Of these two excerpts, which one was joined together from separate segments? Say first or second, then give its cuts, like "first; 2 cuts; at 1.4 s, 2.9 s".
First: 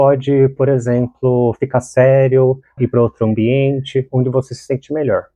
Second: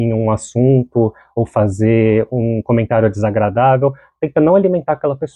first; 1 cut; at 2.8 s